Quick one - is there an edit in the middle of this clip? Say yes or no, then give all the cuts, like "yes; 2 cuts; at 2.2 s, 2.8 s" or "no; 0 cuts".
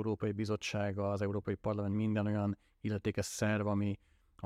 no; 0 cuts